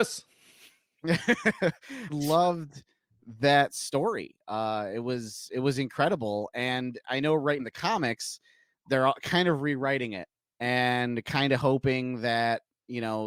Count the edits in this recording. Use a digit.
2